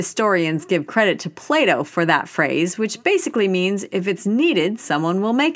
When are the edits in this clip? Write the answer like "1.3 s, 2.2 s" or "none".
none